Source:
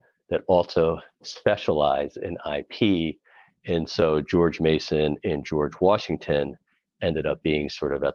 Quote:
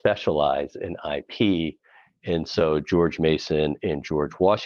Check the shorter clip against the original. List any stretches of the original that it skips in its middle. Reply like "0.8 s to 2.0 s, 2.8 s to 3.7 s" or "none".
none